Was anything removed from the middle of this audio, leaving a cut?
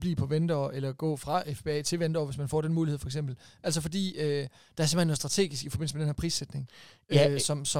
no; 0 cuts

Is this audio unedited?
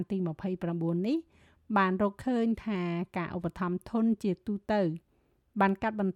yes; 0 cuts

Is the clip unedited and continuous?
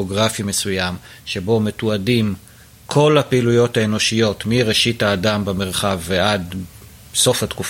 yes; 0 cuts

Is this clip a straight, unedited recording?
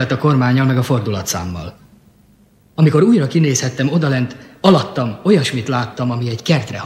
yes; 0 cuts

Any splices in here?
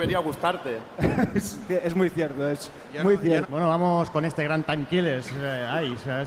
yes; 1 cut; at 3.4 s

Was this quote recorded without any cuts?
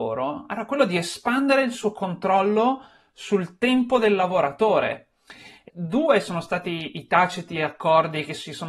no; 1 cut; at 5.7 s

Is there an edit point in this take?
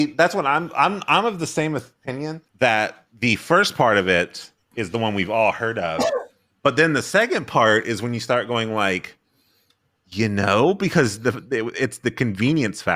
yes; 1 cut; at 2.5 s

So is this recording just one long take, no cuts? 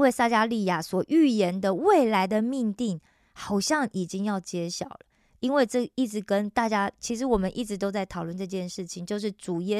yes; 0 cuts

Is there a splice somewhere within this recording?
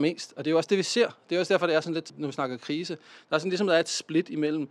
no; 0 cuts

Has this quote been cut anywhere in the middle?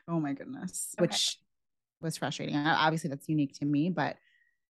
yes; 1 cut; at 1.0 s

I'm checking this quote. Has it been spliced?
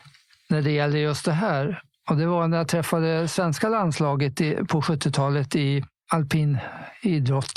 no; 0 cuts

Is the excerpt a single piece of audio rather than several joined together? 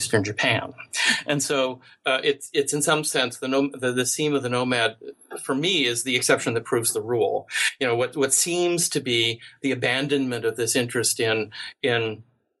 yes; 0 cuts

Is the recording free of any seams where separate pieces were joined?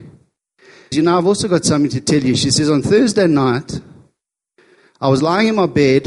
no; 1 cut; at 0.9 s

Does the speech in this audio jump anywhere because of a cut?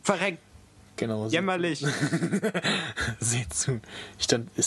no; 0 cuts

